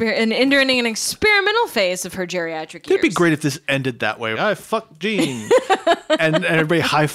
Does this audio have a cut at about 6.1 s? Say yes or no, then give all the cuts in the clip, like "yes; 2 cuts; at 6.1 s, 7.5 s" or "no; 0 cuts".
no; 1 cut; at 4.3 s